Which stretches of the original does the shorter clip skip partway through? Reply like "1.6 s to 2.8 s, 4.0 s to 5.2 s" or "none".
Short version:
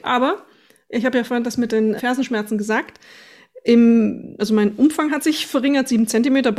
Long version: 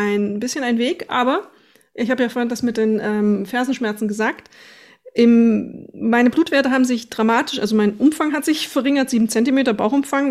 3.0 s to 3.5 s, 5.9 s to 7.6 s